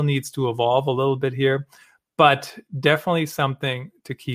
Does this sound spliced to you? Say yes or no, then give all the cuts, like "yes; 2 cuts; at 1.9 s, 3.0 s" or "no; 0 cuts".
no; 0 cuts